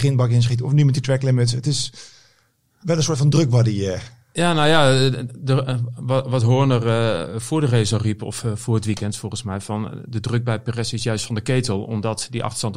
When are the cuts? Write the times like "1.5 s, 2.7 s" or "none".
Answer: none